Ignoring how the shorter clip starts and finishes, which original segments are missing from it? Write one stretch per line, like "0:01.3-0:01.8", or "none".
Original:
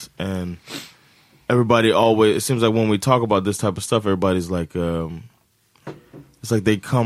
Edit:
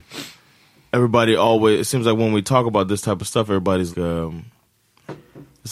0:04.5-0:04.7